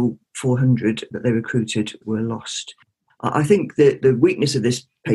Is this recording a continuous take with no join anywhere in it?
no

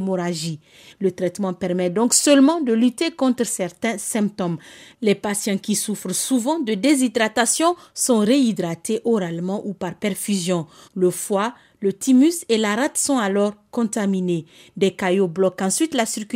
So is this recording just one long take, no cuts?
no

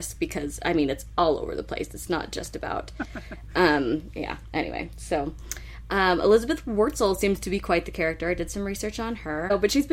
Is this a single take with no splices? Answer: yes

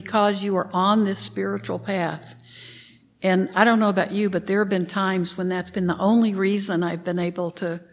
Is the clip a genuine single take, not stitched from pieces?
yes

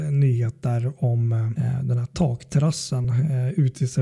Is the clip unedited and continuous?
yes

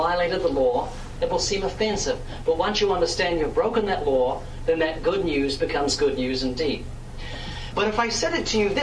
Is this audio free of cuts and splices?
no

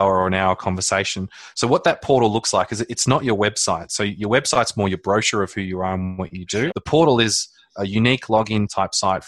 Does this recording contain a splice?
yes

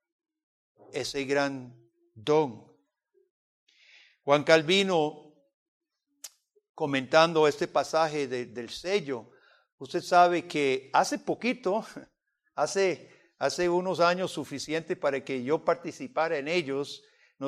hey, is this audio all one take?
yes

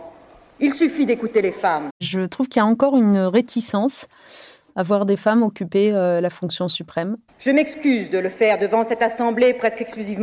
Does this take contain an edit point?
yes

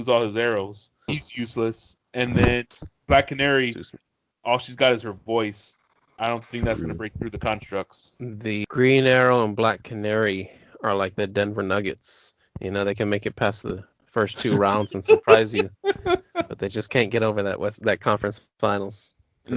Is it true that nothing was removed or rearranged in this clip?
no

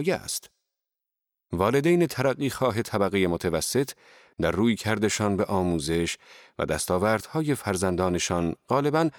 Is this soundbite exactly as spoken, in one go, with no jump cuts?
yes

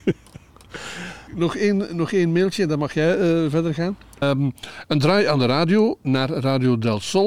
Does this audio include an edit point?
yes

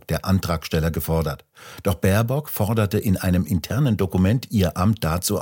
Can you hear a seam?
no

